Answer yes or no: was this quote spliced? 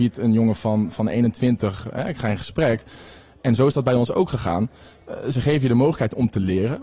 no